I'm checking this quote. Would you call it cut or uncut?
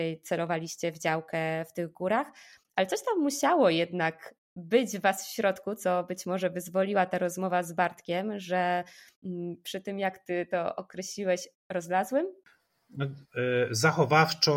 uncut